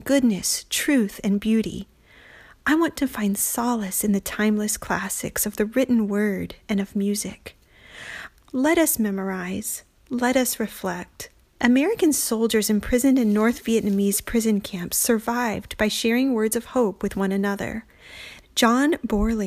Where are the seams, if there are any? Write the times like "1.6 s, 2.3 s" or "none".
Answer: 8.3 s, 11.4 s, 18.4 s

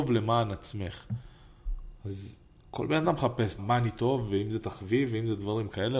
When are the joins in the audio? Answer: 3.6 s

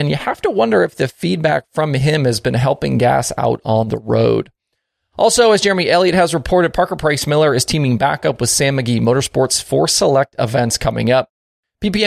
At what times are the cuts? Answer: none

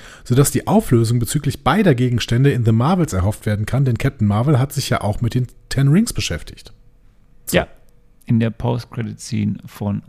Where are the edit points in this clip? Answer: 7.5 s

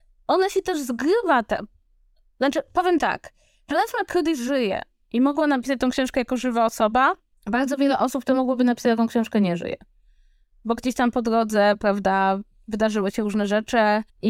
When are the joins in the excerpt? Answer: none

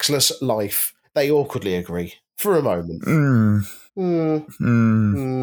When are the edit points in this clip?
3.9 s

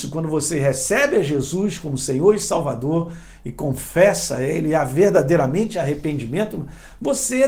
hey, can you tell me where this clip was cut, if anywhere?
none

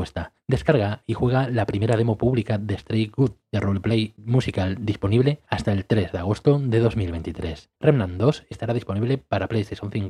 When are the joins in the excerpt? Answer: 7.8 s

